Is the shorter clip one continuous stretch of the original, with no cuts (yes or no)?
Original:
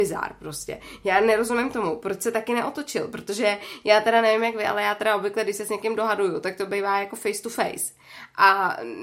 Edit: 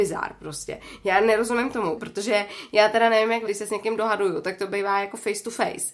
no